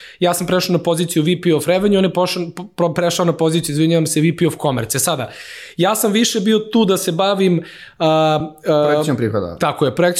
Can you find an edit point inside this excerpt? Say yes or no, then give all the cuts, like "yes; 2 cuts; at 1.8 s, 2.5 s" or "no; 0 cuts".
no; 0 cuts